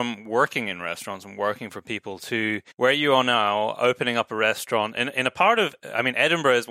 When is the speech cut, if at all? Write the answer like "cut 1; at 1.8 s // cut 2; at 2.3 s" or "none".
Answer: cut 1; at 2.7 s

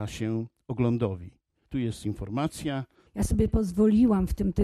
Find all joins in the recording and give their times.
cut 1; at 1.7 s // cut 2; at 3.1 s

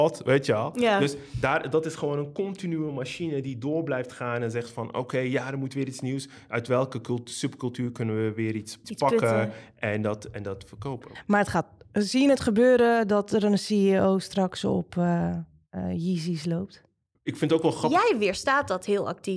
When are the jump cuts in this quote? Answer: cut 1; at 8.8 s // cut 2; at 17.1 s

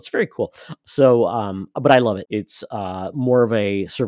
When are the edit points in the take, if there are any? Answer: cut 1; at 2.3 s

